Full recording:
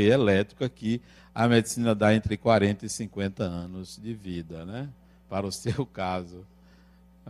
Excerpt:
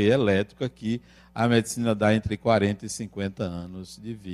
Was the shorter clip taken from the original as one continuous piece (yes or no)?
yes